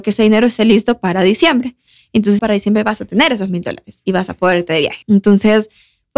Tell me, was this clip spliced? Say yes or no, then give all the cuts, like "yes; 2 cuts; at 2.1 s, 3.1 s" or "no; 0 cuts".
yes; 2 cuts; at 2.4 s, 5.0 s